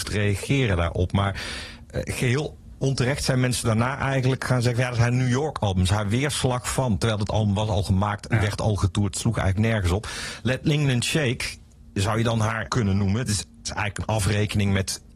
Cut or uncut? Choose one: cut